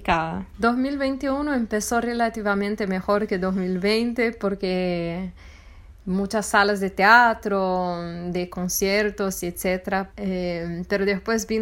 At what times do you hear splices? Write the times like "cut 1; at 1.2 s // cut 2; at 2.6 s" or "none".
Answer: cut 1; at 10.1 s